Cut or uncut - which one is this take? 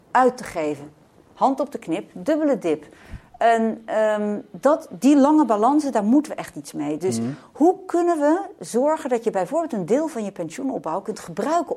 uncut